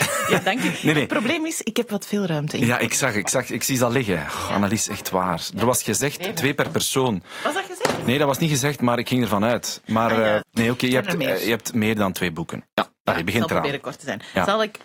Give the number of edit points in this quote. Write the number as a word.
one